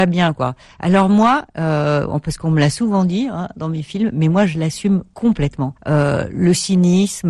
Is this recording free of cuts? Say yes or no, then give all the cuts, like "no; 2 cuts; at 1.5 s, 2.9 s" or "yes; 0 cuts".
no; 1 cut; at 5.8 s